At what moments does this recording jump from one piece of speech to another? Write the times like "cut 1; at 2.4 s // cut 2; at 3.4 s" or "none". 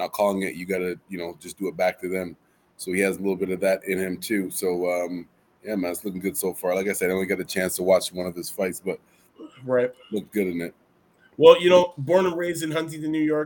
none

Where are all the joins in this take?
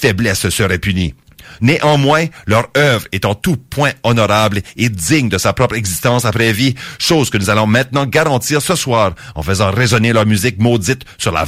cut 1; at 1.6 s

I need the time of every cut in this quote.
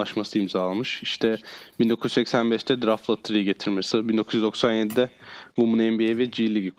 cut 1; at 3.9 s

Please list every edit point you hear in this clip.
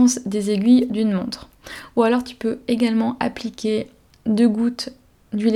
none

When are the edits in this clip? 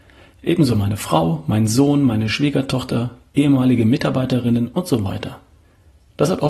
none

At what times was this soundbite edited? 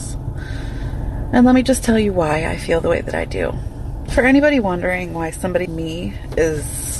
cut 1; at 4.1 s // cut 2; at 5.7 s

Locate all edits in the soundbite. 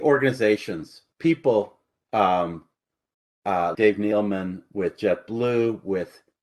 cut 1; at 3.7 s

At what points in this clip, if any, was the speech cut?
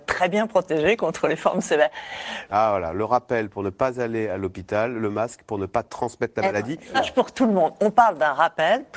cut 1; at 2.5 s // cut 2; at 6.9 s

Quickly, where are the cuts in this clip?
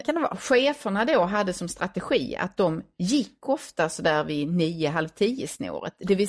none

